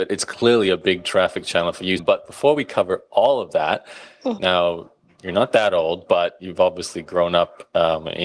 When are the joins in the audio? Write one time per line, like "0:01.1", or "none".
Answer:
0:02.0
0:04.4